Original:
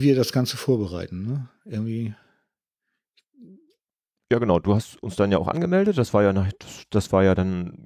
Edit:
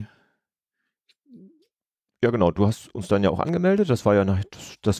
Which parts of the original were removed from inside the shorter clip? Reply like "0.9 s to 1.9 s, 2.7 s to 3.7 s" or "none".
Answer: none